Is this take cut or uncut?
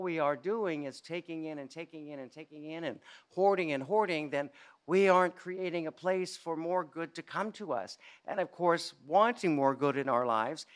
uncut